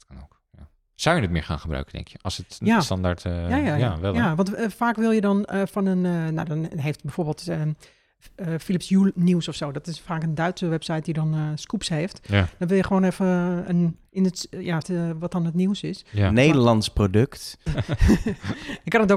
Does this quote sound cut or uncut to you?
cut